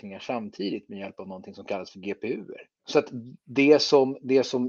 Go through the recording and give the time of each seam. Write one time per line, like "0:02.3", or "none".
0:02.8